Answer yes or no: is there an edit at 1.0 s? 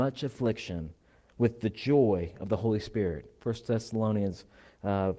no